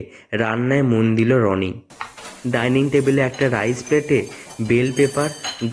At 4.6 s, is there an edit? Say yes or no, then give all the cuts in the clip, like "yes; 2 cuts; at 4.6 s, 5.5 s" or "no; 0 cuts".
no; 0 cuts